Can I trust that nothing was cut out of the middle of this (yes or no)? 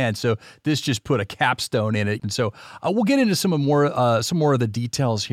no